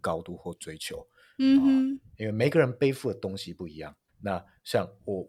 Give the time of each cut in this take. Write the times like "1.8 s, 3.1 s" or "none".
4.1 s